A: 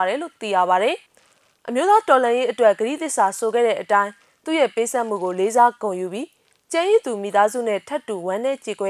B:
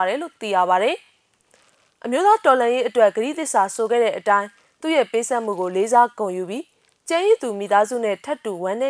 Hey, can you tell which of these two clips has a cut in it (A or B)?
A